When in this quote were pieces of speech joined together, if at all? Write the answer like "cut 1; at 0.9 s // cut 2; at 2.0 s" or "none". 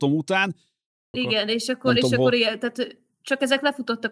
cut 1; at 1.1 s

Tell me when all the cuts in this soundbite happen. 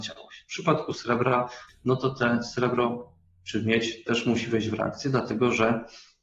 cut 1; at 1.7 s

